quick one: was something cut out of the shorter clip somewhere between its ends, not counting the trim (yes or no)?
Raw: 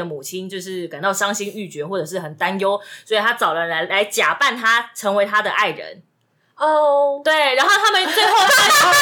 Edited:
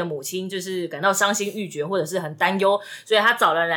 no